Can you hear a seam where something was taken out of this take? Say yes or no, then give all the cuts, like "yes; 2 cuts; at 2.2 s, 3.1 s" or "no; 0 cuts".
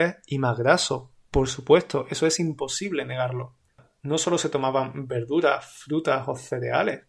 no; 0 cuts